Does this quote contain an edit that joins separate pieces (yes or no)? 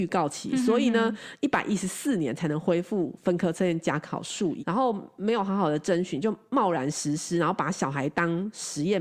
yes